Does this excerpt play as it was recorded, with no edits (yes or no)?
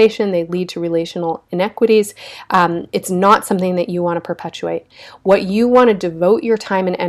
yes